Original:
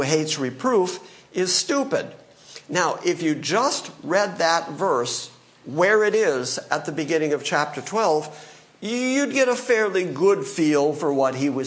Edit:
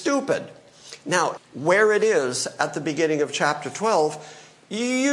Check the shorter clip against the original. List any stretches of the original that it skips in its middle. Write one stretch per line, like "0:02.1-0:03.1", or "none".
0:03.0-0:05.5